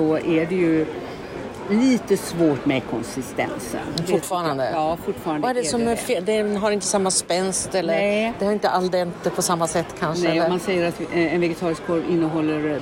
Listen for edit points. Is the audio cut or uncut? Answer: uncut